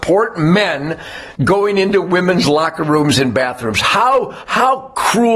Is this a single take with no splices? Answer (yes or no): no